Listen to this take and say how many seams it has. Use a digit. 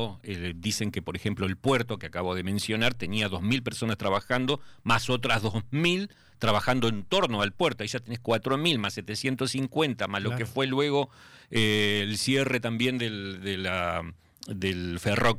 0